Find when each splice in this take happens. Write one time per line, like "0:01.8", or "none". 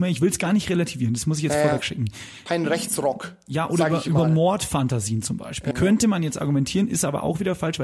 0:02.5
0:05.7